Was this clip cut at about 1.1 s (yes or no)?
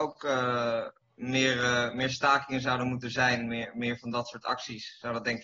no